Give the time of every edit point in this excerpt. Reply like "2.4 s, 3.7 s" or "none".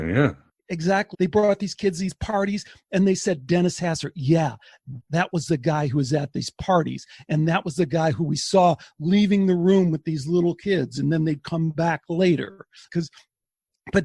1.1 s, 5.0 s, 12.9 s